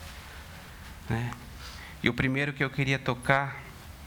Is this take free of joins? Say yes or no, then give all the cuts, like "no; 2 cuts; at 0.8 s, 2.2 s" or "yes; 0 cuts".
yes; 0 cuts